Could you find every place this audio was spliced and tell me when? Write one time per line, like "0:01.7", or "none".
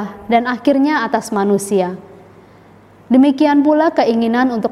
none